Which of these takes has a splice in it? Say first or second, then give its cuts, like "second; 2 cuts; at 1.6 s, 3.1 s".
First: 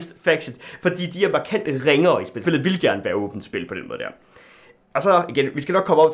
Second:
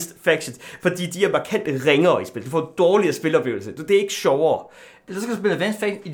first; 1 cut; at 2.4 s